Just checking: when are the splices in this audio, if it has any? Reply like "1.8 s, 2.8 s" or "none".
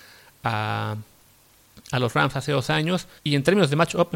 3.2 s

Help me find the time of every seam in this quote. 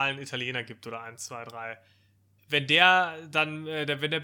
2.4 s

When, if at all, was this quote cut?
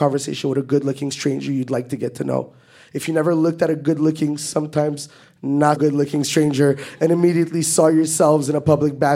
5.8 s

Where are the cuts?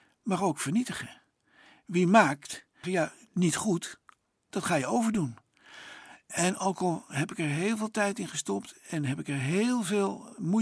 2.8 s

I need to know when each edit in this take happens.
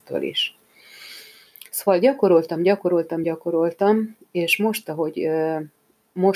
none

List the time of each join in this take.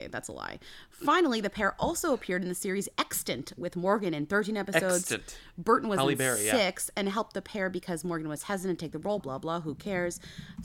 9.2 s

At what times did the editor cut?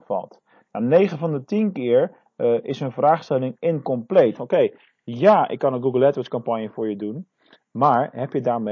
4.4 s

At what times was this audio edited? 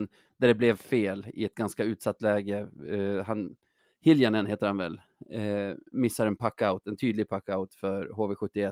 none

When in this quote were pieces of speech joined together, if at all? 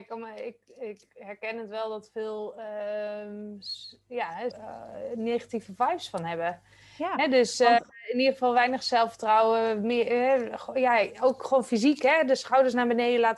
4.5 s

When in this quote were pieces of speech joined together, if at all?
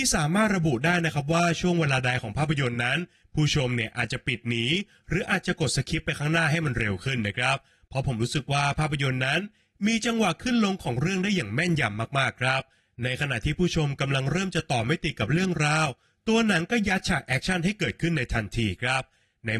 none

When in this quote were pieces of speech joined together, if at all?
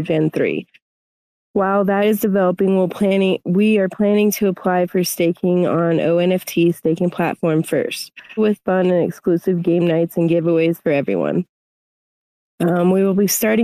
8.4 s

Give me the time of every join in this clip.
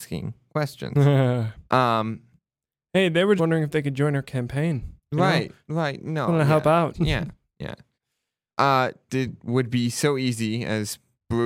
3.4 s, 6.9 s, 9.1 s

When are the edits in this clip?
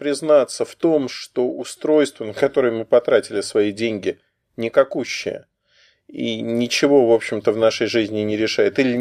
none

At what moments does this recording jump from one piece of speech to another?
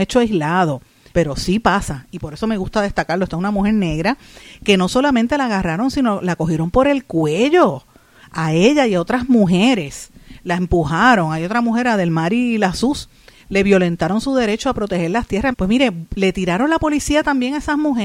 1.1 s, 15.5 s

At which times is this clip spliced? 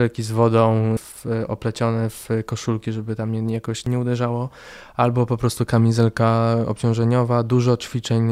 1.0 s

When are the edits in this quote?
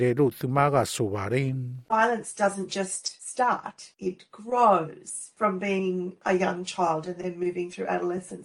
none

